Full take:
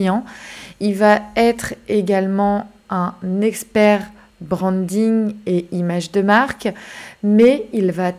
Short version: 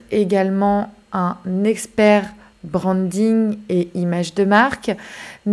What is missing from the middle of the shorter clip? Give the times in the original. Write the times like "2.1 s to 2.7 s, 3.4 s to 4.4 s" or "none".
none